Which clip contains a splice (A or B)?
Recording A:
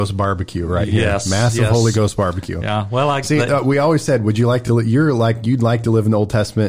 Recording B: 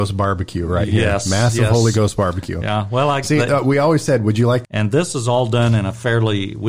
B